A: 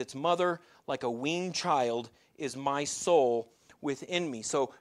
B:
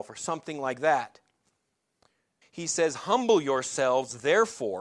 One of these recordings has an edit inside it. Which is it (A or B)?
B